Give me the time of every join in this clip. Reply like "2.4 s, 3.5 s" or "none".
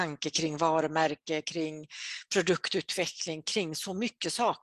none